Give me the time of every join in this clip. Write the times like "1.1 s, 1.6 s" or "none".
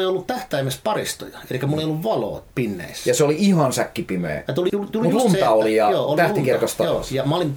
4.7 s